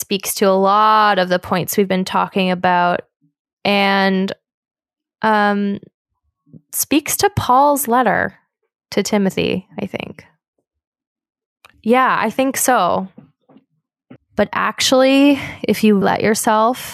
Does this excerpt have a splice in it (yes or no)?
yes